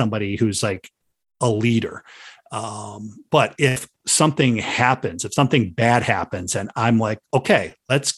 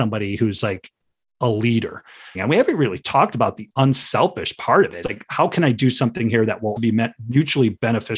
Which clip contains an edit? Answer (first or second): second